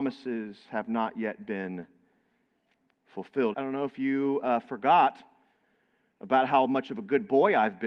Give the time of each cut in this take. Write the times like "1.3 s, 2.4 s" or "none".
3.5 s